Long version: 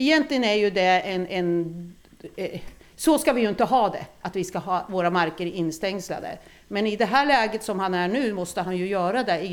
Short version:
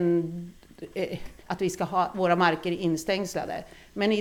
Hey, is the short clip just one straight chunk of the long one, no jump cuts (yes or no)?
no